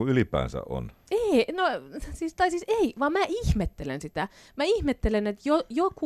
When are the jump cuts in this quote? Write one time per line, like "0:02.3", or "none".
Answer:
none